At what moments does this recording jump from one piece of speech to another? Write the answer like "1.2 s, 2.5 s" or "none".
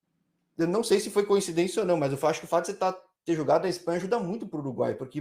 none